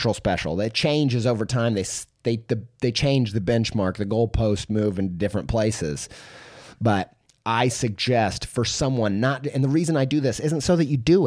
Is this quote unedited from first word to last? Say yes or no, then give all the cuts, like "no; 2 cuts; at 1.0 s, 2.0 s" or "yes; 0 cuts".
yes; 0 cuts